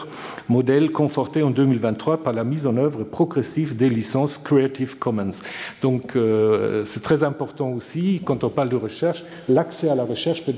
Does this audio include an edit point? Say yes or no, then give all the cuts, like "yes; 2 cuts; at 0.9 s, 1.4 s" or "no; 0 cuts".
no; 0 cuts